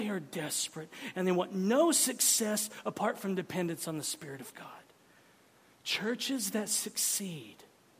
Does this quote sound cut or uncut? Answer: uncut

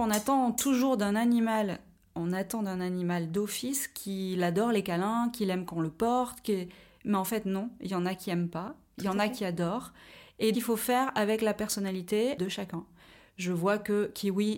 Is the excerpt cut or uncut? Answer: cut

